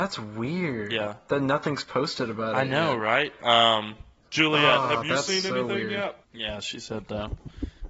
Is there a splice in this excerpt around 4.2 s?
no; 1 cut; at 6.2 s

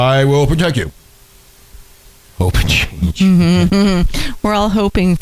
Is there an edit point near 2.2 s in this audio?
yes; 1 cut; at 2.2 s

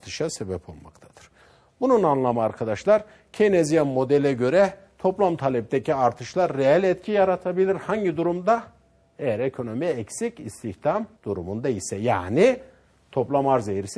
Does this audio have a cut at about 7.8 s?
no; 1 cut; at 11.2 s

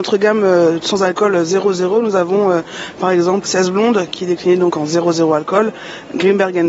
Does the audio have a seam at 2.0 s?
no; 1 cut; at 3.5 s

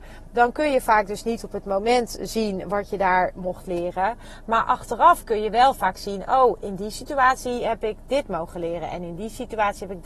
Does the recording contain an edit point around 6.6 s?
yes; 1 cut; at 6.6 s

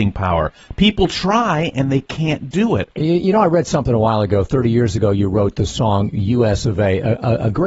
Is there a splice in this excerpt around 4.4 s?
no; 1 cut; at 3.0 s

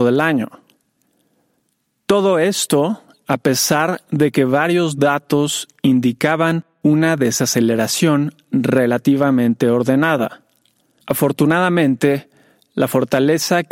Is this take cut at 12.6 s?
no; 1 cut; at 11.0 s

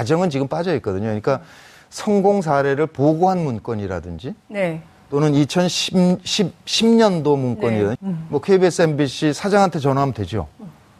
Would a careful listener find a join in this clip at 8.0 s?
yes; 1 cut; at 8.0 s

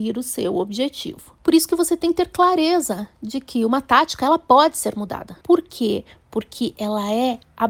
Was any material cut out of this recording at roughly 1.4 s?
no; 1 cut; at 5.4 s

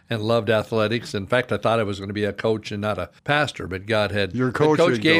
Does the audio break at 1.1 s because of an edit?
no; 1 cut; at 3.2 s

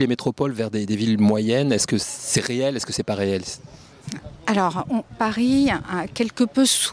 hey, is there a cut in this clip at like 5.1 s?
yes; 1 cut; at 5.1 s

